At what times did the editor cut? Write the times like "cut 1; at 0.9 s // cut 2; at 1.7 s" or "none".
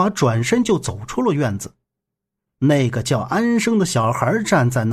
cut 1; at 2.5 s